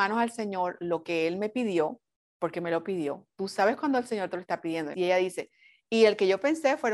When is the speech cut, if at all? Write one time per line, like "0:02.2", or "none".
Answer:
0:04.9